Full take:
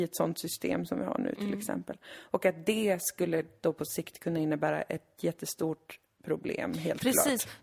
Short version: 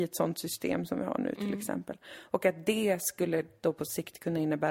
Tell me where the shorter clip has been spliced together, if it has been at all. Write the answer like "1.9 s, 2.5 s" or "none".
none